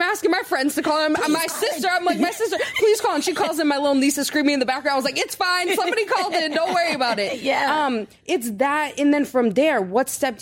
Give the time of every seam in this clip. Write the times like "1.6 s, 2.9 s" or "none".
none